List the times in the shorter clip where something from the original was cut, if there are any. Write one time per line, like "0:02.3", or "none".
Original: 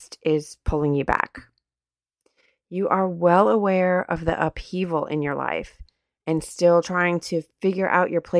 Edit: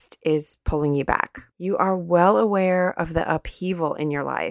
0:01.5